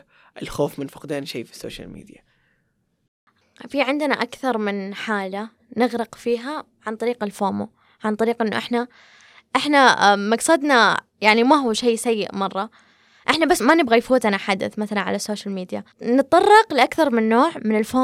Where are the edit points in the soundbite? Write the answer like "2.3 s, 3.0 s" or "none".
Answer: 13.6 s, 15.9 s